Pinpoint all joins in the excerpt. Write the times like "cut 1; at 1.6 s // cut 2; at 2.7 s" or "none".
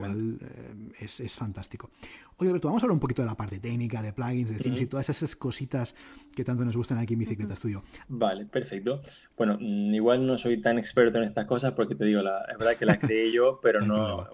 cut 1; at 8.0 s